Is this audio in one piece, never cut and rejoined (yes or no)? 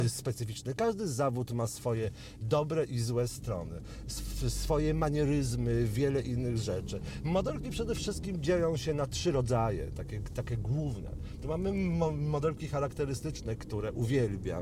yes